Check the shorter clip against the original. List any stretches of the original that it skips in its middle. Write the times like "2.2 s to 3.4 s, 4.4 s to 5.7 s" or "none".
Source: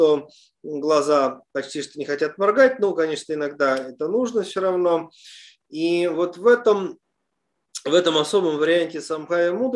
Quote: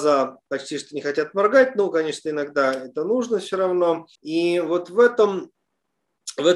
5.2 s to 5.6 s